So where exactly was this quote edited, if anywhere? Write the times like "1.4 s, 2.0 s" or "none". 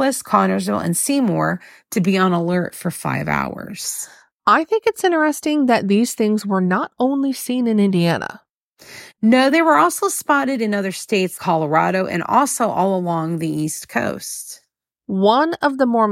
11.4 s